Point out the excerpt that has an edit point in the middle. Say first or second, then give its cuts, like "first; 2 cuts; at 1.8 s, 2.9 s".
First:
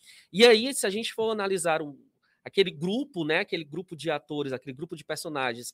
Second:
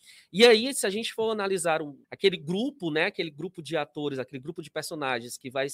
second; 1 cut; at 2.0 s